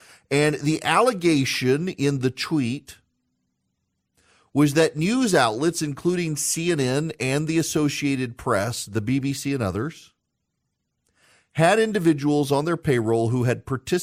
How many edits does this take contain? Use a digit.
0